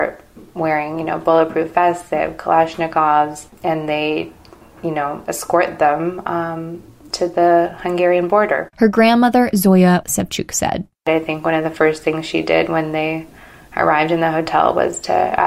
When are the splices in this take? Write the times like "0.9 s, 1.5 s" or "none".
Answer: 8.7 s, 10.0 s